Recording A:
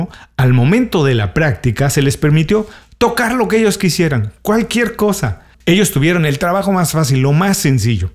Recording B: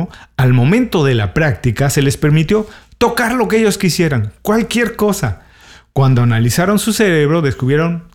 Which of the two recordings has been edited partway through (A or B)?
A